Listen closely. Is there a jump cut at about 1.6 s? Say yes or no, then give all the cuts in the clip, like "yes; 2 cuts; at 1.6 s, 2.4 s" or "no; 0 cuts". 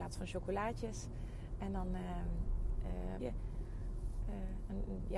no; 1 cut; at 3.2 s